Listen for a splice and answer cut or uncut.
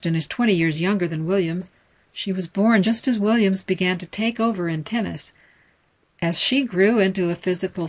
uncut